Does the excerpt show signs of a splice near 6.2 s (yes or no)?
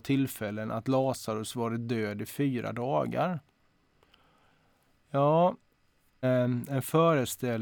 yes